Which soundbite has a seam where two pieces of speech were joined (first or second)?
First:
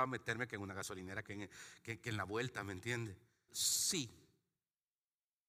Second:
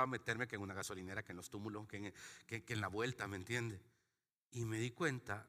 first